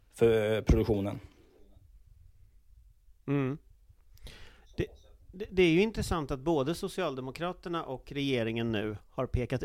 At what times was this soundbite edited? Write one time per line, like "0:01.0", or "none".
none